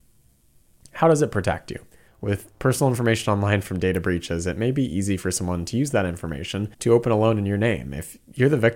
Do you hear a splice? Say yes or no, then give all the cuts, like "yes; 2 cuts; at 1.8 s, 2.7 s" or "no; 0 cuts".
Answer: yes; 2 cuts; at 2.1 s, 6.7 s